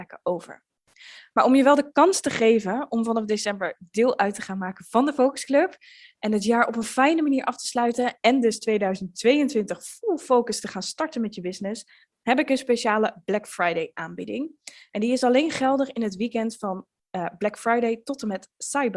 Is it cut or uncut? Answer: uncut